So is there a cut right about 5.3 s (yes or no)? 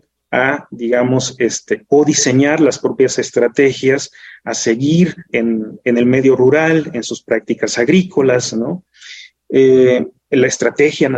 yes